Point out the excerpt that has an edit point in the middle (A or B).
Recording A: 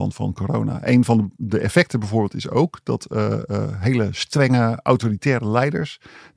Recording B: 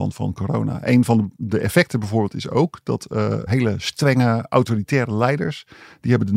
B